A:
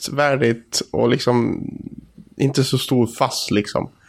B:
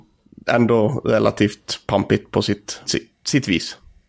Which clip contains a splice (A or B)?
B